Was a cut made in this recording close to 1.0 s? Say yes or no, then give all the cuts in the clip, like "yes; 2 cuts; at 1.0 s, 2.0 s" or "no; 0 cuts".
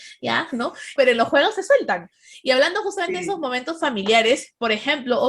yes; 1 cut; at 1.0 s